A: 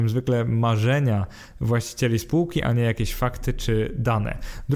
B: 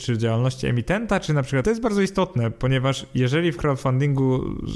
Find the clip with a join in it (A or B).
B